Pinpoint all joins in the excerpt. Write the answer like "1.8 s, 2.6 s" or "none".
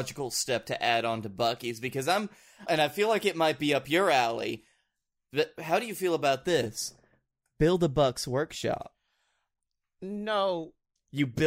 2.7 s

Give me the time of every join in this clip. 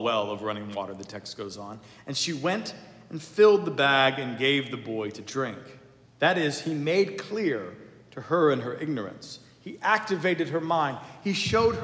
6.1 s

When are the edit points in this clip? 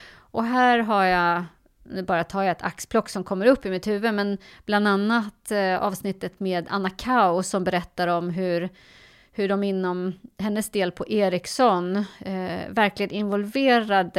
none

